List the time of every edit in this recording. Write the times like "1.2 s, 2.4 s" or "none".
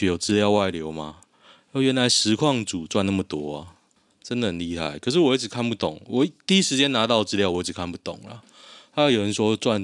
none